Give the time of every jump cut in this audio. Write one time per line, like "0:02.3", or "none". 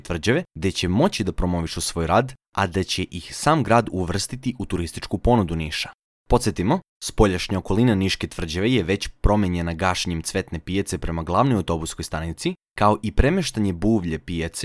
0:06.2